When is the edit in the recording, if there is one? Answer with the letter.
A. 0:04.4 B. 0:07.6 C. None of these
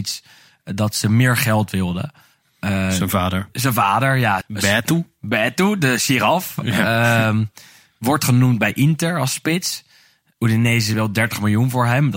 A